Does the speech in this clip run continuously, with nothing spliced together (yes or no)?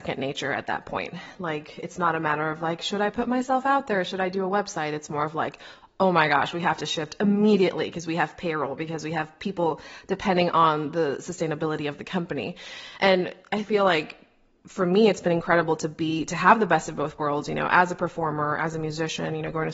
yes